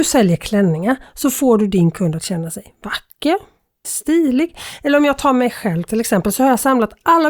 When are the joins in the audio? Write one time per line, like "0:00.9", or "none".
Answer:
0:03.8